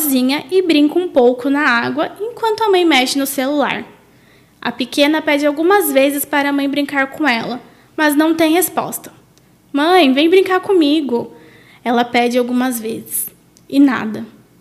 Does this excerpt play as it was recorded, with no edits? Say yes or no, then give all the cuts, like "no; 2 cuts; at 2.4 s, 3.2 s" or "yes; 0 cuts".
yes; 0 cuts